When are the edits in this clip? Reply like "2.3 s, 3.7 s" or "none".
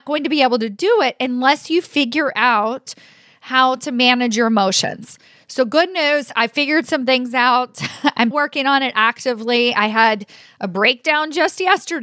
8.3 s